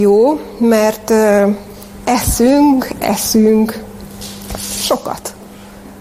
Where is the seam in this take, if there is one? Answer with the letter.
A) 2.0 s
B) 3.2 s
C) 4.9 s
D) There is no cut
D